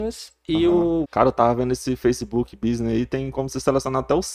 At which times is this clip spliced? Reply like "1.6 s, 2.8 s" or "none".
1.0 s